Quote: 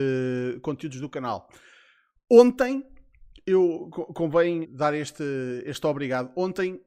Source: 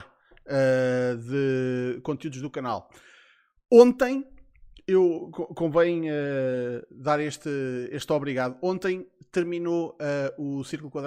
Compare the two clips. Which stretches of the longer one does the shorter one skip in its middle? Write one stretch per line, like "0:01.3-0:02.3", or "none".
0:06.0-0:06.9

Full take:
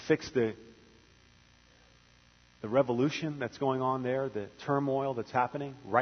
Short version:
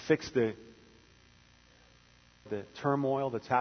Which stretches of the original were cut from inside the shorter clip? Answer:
0:02.5-0:04.3

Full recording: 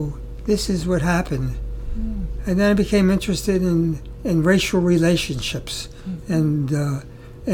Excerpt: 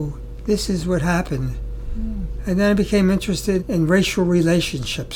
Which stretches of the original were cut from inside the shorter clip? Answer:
0:03.6-0:04.1

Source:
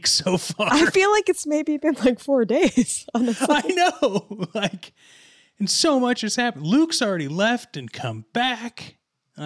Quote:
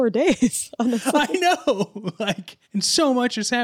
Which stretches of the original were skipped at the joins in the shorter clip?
0:05.0-0:05.5

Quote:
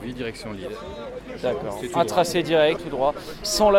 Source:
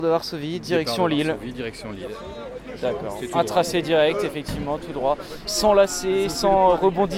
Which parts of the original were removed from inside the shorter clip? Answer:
0:04.2-0:04.8

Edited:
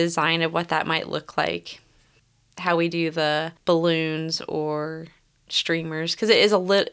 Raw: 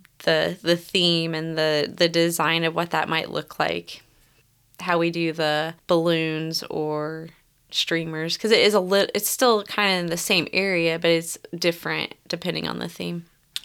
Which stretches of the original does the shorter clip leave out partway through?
none

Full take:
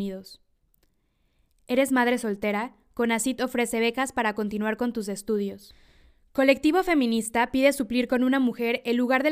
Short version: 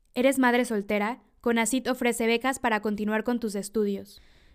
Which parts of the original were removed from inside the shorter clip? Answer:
none

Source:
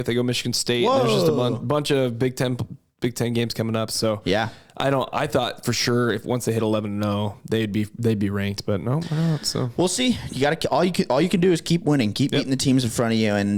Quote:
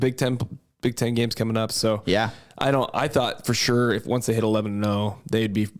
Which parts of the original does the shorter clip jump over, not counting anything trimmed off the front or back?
none

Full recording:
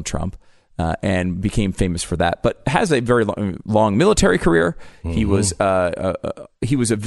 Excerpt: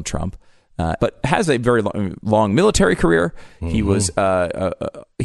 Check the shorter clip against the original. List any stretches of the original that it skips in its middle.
0:01.0-0:02.4

